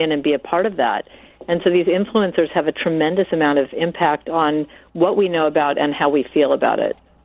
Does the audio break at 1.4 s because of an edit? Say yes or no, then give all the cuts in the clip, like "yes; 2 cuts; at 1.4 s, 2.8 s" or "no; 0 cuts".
no; 0 cuts